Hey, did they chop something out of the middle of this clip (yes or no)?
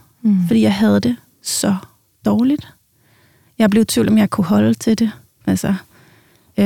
yes